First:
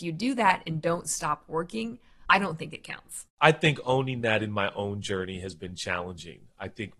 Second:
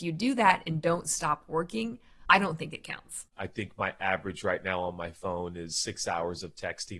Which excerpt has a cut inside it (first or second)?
second